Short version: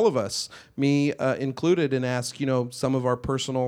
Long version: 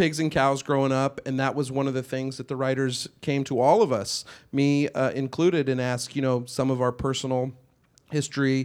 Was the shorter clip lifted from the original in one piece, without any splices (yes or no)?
yes